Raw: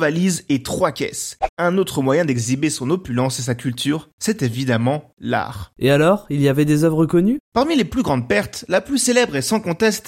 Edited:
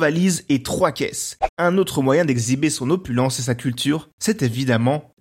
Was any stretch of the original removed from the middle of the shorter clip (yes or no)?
no